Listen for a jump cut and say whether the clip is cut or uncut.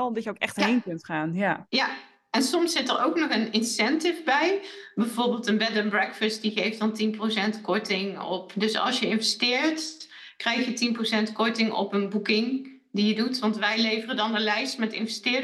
uncut